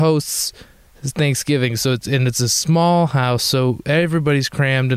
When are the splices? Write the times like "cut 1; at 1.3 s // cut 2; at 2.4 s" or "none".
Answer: none